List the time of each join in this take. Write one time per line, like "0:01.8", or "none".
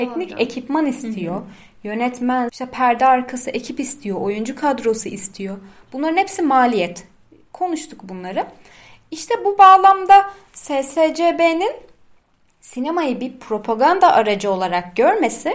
0:02.5